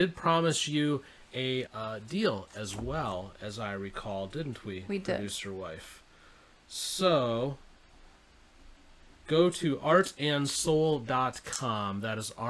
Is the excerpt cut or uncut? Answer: cut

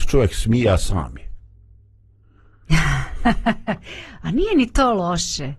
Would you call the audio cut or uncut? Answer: uncut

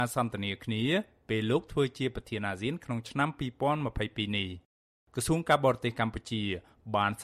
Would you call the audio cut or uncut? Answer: uncut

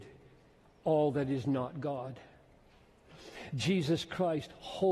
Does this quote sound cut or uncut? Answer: uncut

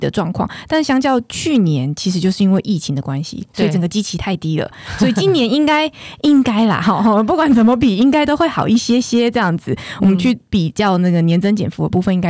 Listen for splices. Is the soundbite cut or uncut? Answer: uncut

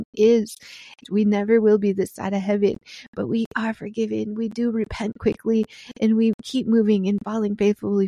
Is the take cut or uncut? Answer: cut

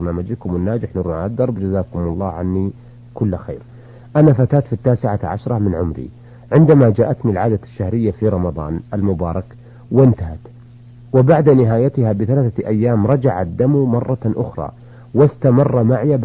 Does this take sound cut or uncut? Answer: uncut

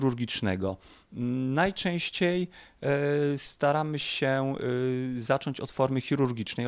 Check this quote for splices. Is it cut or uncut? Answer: uncut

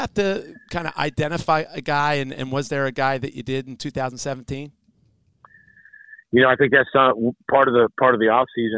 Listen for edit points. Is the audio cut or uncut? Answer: uncut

